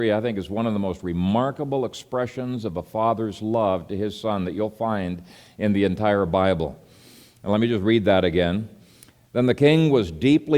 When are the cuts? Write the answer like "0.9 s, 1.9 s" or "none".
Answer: none